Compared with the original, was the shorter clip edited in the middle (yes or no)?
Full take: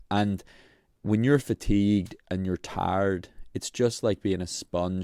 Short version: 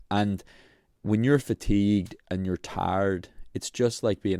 no